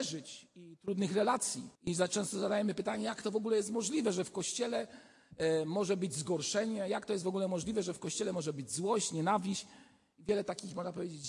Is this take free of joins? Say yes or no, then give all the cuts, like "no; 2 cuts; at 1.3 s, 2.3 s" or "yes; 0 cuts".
no; 1 cut; at 1.8 s